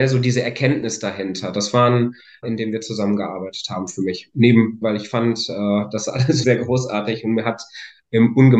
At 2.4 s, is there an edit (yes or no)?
yes